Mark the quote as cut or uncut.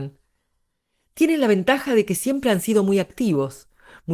uncut